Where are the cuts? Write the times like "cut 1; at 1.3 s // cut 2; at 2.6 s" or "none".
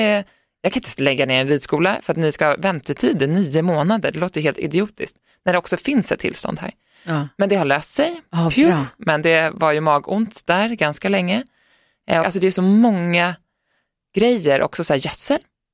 cut 1; at 12.2 s